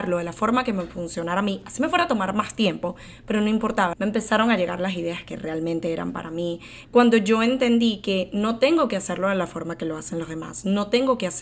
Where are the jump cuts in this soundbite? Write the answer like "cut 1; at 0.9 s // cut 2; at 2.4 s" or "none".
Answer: cut 1; at 3.9 s // cut 2; at 6.8 s